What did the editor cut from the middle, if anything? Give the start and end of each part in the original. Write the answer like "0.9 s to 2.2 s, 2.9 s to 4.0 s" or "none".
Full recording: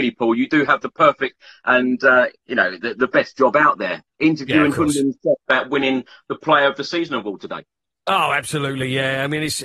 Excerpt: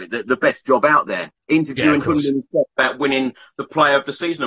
none